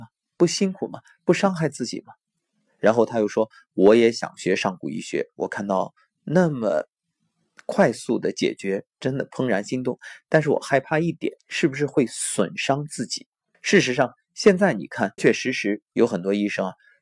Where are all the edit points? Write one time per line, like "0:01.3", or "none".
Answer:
0:11.4
0:13.5
0:15.2